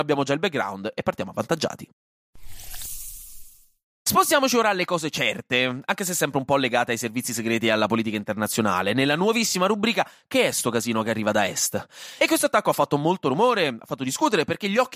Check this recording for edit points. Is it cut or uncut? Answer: cut